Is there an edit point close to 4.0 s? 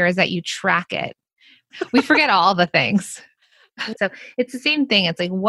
yes; 2 cuts; at 1.7 s, 4.0 s

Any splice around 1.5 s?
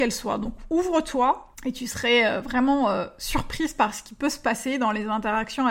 yes; 1 cut; at 1.5 s

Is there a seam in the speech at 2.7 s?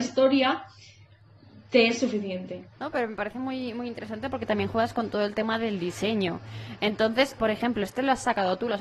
yes; 2 cuts; at 2.7 s, 7.4 s

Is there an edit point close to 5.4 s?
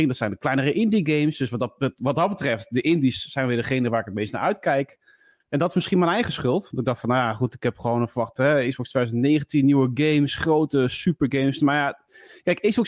yes; 1 cut; at 5.4 s

